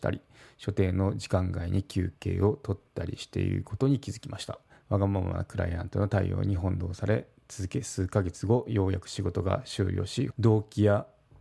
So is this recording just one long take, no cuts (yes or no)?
no